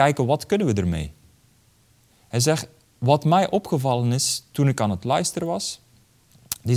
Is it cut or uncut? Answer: cut